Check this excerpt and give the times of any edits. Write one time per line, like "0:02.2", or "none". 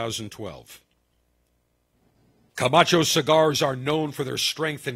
none

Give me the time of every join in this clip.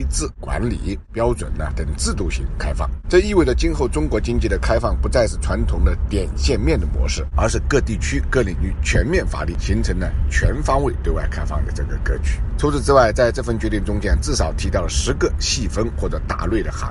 none

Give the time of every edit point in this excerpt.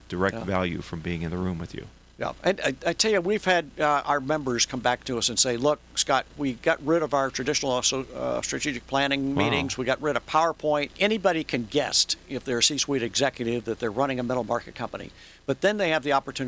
0:10.9

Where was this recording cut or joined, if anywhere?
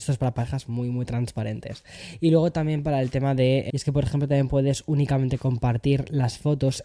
0:03.7

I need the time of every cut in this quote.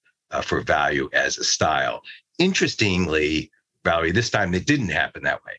none

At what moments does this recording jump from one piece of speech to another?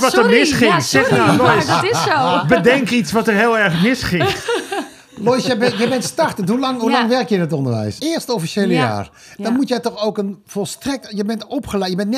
0:08.0

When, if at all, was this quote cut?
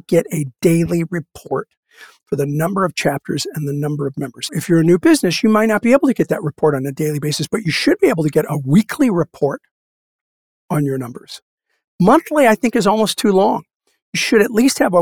0:04.5

